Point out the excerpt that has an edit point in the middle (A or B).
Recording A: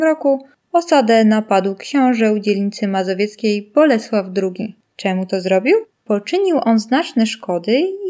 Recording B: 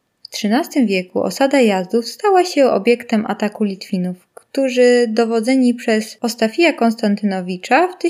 A